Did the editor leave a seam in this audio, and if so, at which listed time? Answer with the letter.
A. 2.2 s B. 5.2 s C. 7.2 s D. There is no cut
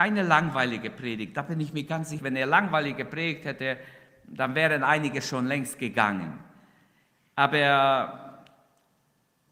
A